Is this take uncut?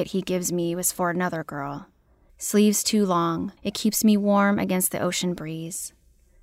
no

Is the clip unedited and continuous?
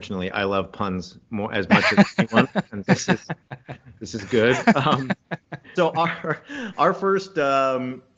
no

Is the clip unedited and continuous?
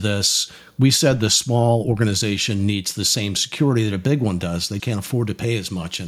no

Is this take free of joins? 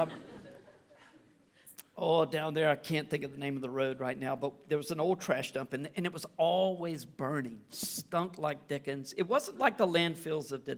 yes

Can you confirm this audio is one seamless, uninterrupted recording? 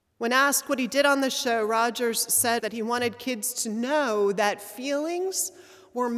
no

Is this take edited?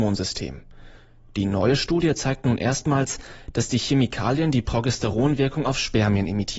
no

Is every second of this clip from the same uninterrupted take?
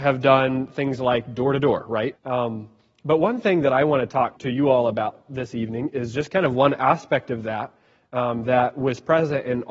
no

